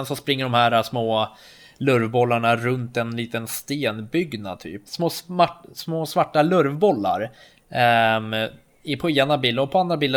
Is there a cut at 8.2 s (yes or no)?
no